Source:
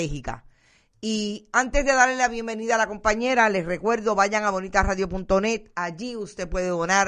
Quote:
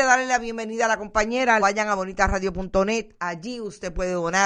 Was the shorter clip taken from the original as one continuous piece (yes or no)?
no